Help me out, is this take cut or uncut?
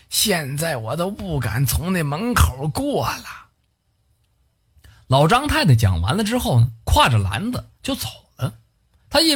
uncut